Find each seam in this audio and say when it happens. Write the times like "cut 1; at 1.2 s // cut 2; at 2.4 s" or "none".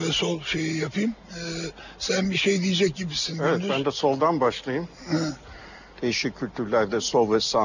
cut 1; at 5.9 s

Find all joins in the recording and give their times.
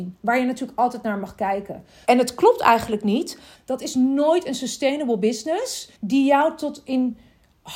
cut 1; at 2.0 s // cut 2; at 3.5 s // cut 3; at 5.9 s

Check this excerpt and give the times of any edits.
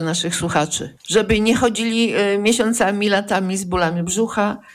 cut 1; at 1.0 s

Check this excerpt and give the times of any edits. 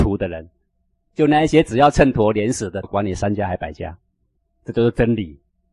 cut 1; at 2.8 s // cut 2; at 4.5 s

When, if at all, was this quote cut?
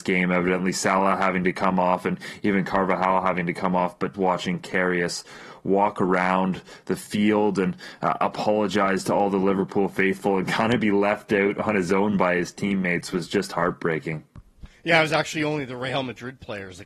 cut 1; at 4.1 s

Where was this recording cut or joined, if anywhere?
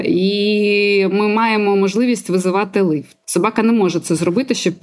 cut 1; at 3.2 s

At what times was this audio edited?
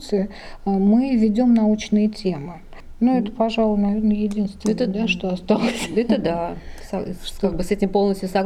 none

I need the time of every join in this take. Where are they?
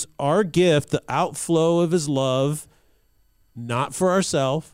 none

